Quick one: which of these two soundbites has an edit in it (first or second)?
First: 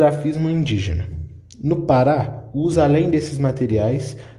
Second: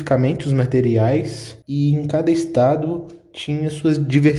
second